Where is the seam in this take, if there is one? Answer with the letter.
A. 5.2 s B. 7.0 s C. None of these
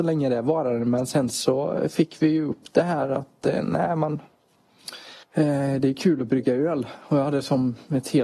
A